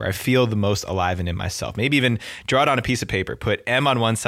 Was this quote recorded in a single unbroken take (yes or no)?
yes